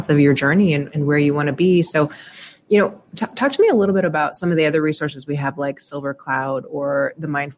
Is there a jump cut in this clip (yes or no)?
no